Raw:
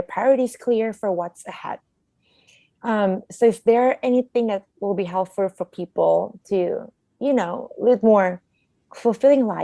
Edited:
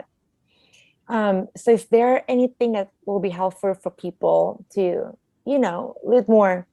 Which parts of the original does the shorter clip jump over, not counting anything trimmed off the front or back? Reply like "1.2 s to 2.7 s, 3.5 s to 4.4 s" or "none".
none